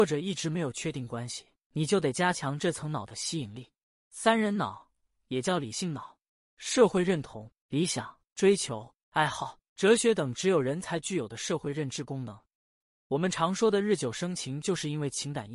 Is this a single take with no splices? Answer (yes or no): no